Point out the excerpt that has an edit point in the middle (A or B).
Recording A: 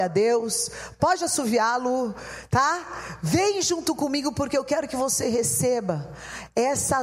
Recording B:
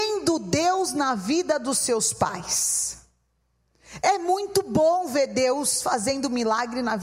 A